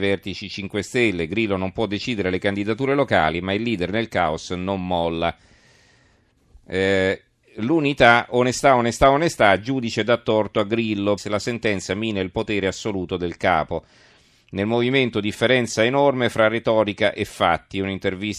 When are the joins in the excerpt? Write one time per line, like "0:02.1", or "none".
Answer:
0:11.2

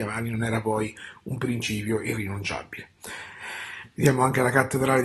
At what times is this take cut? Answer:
none

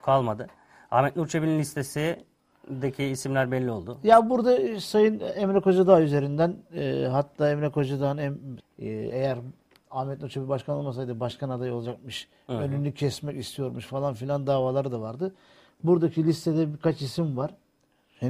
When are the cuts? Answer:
0:08.6

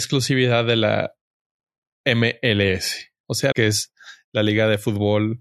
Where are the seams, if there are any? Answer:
0:03.5

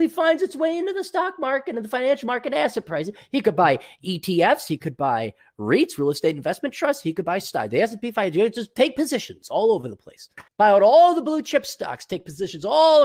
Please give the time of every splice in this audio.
0:10.5

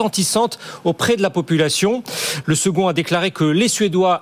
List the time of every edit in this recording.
0:02.4

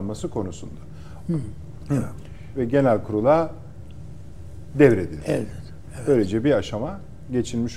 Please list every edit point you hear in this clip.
0:01.2
0:02.5

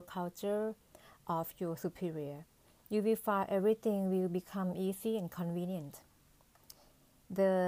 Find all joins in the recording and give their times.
none

